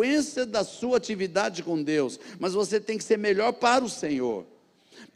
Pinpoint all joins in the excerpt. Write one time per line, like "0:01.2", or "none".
none

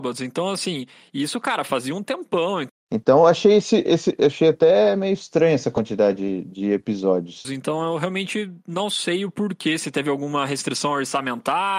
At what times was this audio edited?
0:02.7
0:07.4

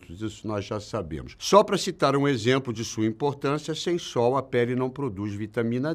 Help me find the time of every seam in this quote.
0:01.4

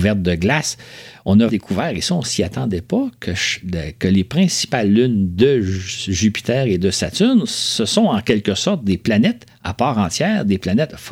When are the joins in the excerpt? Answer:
0:01.5

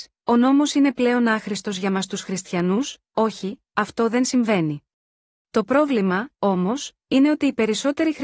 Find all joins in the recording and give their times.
0:05.4

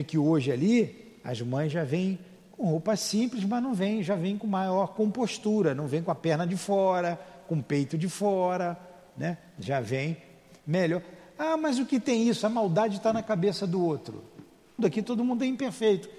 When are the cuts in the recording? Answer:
0:14.8

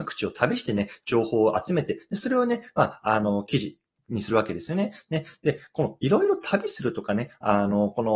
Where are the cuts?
none

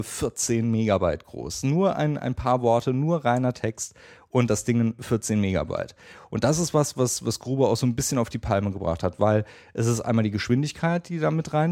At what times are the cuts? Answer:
none

